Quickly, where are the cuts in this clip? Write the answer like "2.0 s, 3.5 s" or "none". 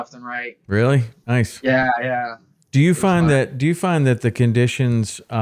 none